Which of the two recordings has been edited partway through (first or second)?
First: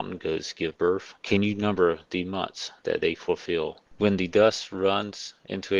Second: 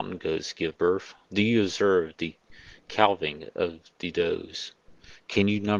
first